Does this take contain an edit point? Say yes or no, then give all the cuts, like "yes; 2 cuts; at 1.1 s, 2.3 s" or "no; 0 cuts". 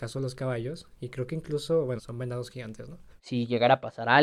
yes; 2 cuts; at 2.0 s, 3.2 s